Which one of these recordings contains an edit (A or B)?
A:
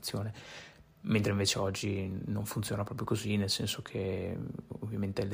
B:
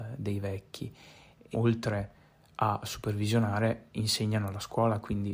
B